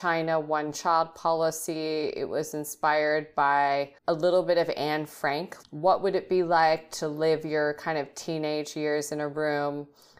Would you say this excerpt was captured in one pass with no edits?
no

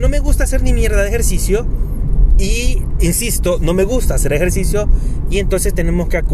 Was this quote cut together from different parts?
no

